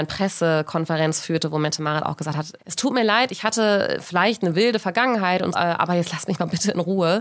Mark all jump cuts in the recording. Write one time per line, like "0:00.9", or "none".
0:02.6
0:05.5